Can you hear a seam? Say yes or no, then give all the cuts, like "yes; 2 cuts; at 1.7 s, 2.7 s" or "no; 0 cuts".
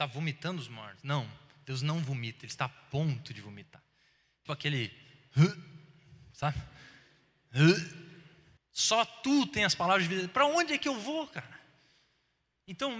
yes; 2 cuts; at 4.5 s, 8.6 s